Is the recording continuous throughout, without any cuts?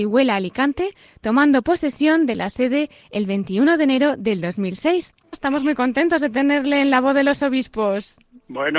no; 1 cut; at 5.3 s

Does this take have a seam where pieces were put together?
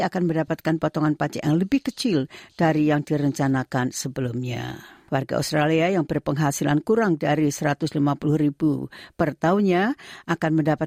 yes; 1 cut; at 5.1 s

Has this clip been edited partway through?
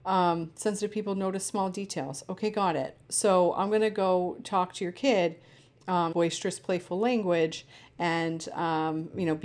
yes; 1 cut; at 6.1 s

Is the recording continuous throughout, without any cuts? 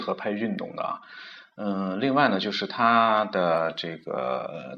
yes; 0 cuts

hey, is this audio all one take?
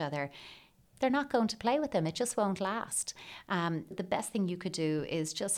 no; 1 cut; at 3.9 s

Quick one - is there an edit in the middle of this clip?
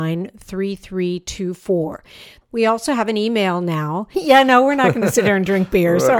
yes; 2 cuts; at 2.4 s, 4.1 s

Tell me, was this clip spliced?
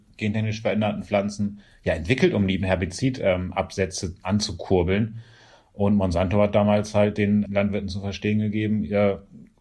yes; 1 cut; at 7.5 s

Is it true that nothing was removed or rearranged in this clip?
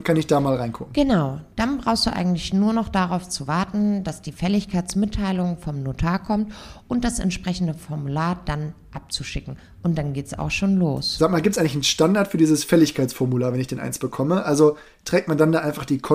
yes; 0 cuts

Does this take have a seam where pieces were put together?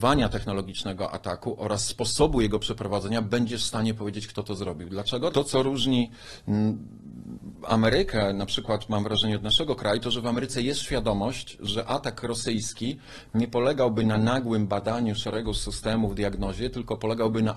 yes; 1 cut; at 5.3 s

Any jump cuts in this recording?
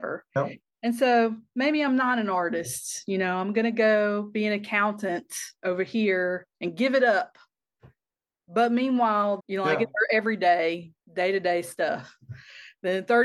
yes; 2 cuts; at 9.4 s, 11.0 s

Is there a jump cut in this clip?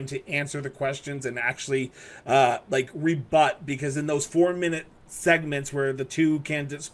no; 0 cuts

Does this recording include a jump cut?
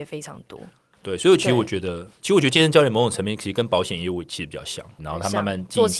yes; 1 cut; at 5.0 s

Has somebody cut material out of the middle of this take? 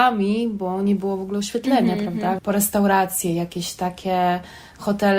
yes; 1 cut; at 2.4 s

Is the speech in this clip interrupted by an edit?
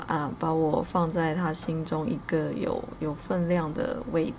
yes; 1 cut; at 3.0 s

